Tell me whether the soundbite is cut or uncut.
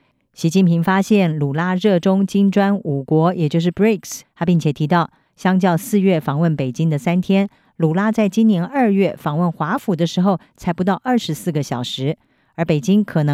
cut